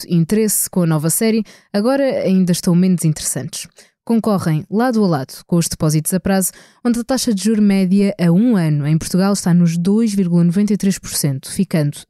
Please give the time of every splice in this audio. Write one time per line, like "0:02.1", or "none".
none